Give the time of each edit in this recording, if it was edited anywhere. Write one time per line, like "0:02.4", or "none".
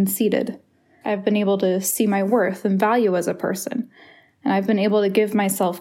0:01.0